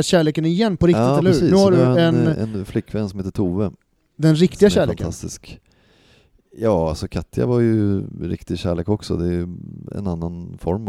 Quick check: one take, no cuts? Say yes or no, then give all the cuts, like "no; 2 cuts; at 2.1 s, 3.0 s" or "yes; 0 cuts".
yes; 0 cuts